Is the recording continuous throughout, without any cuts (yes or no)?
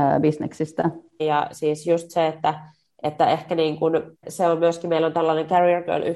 no